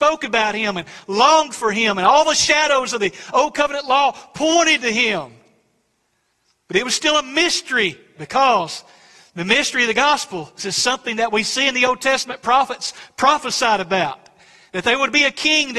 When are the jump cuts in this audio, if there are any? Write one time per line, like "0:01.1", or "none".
0:08.2
0:10.6